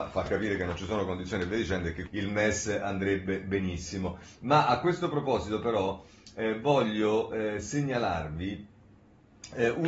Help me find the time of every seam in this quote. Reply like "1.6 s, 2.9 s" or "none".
2.1 s